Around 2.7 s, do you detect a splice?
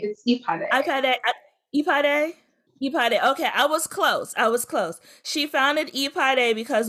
yes; 1 cut; at 2.7 s

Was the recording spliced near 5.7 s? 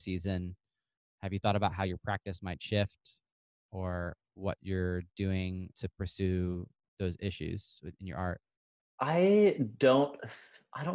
yes; 1 cut; at 5.7 s

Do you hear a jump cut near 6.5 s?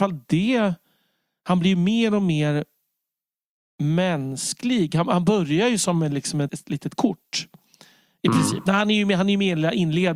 yes; 1 cut; at 6.5 s

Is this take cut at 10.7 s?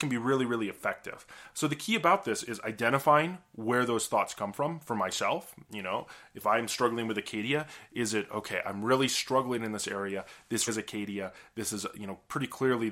yes; 1 cut; at 10.7 s

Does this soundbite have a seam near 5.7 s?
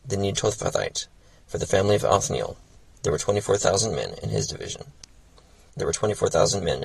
yes; 1 cut; at 5.7 s

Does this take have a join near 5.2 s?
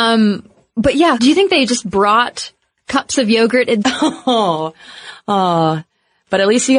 no; 2 cuts; at 1.2 s, 3.8 s

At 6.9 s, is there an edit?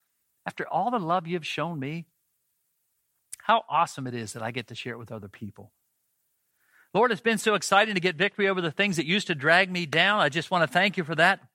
no; 0 cuts

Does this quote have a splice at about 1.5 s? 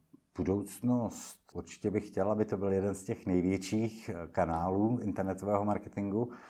yes; 1 cut; at 1.5 s

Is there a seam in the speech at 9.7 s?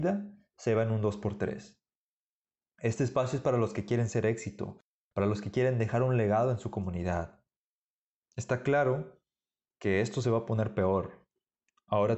no; 1 cut; at 2.6 s

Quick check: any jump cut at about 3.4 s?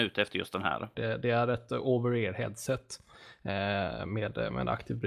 no; 1 cut; at 0.9 s

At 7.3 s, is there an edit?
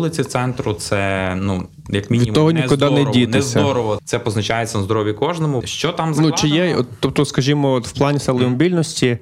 no; 2 cuts; at 4.0 s, 5.6 s

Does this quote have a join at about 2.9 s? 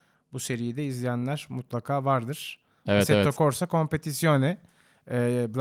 yes; 1 cut; at 2.9 s

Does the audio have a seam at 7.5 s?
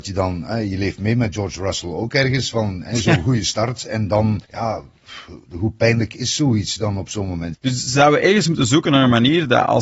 yes; 2 cuts; at 4.4 s, 7.5 s

